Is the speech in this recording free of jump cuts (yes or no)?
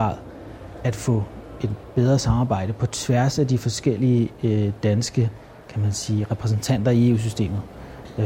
yes